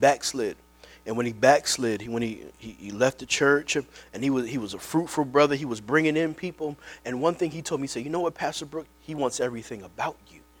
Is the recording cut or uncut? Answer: cut